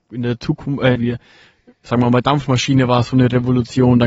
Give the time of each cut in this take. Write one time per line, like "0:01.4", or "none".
0:01.0